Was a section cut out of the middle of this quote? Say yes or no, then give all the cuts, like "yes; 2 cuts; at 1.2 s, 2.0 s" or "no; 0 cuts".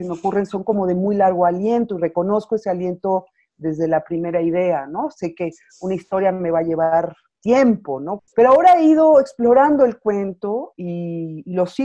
yes; 1 cut; at 8.2 s